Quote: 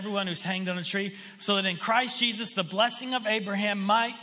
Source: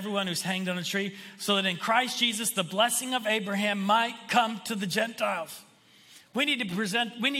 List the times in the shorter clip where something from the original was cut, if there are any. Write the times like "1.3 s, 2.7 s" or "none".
none